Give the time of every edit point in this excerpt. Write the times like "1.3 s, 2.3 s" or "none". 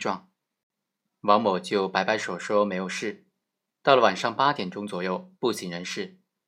1.0 s, 5.3 s